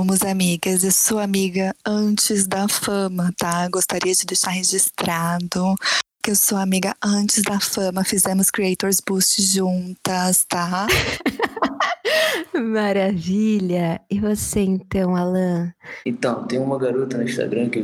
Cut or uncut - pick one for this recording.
uncut